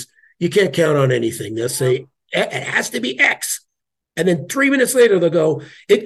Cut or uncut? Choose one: uncut